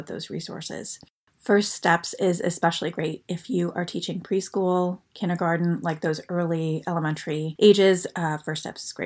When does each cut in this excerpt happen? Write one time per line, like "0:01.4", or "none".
none